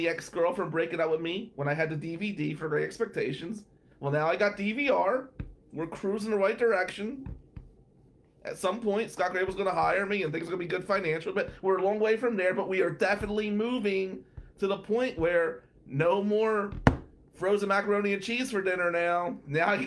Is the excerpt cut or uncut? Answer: uncut